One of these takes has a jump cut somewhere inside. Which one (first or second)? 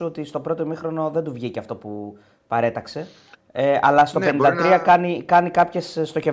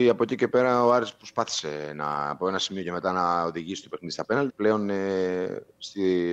second